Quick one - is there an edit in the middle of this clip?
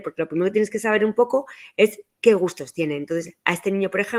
no; 0 cuts

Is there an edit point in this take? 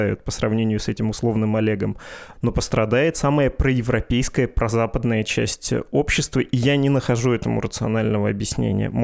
yes; 1 cut; at 2.3 s

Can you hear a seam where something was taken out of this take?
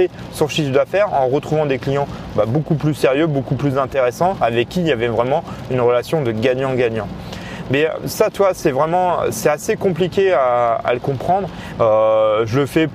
yes; 1 cut; at 11.8 s

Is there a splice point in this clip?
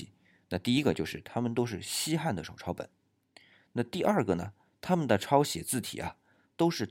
no; 0 cuts

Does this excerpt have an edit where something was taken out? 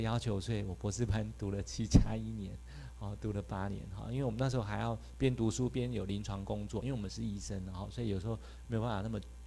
no; 0 cuts

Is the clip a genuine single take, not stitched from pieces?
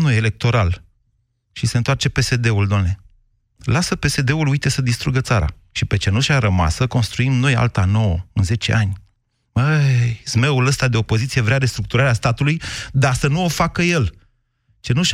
yes; 0 cuts

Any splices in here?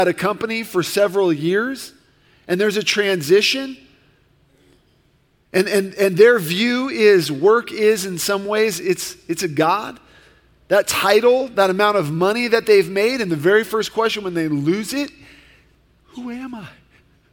no; 0 cuts

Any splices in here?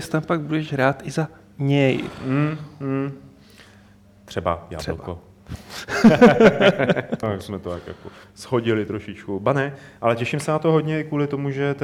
yes; 1 cut; at 7.2 s

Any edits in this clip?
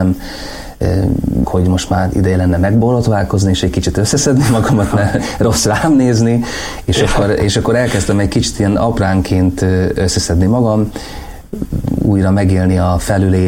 yes; 1 cut; at 1.4 s

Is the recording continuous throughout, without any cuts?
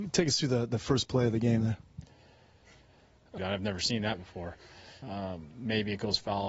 no; 2 cuts; at 3.4 s, 5.0 s

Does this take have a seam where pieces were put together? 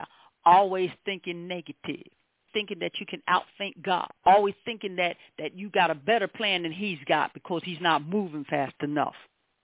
yes; 2 cuts; at 2.5 s, 4.2 s

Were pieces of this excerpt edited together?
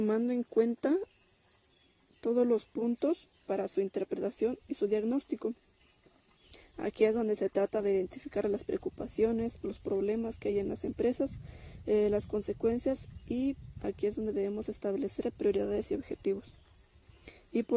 no; 0 cuts

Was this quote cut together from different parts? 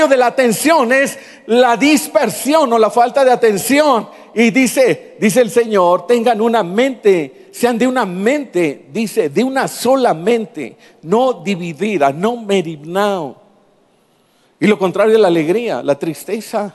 no; 0 cuts

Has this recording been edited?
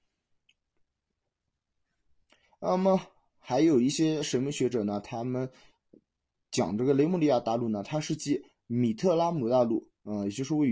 no; 0 cuts

